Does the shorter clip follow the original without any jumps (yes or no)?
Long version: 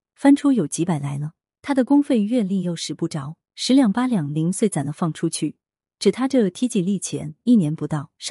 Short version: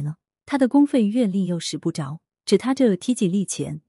no